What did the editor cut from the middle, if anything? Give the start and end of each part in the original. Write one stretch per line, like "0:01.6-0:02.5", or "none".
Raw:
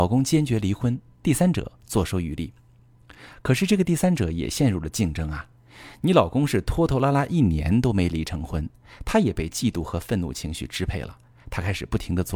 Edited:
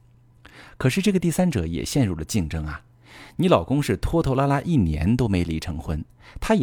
none